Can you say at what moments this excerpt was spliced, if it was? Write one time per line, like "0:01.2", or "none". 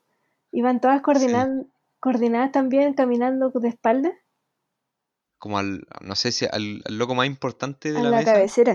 0:05.2